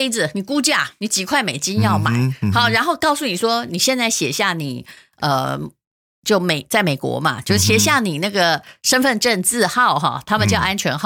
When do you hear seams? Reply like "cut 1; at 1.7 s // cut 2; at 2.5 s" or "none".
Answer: none